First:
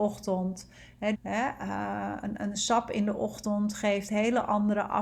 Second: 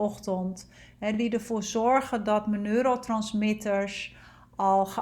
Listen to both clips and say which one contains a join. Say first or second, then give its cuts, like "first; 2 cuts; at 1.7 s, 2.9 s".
first; 1 cut; at 1.1 s